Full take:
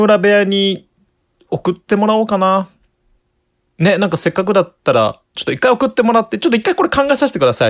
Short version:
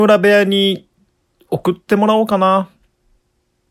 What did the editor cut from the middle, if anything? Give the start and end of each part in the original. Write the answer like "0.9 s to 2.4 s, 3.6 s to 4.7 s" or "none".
none